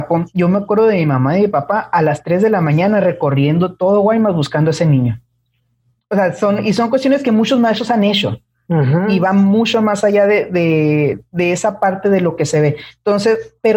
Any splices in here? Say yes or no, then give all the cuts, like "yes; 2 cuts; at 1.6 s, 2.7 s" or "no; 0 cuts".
no; 0 cuts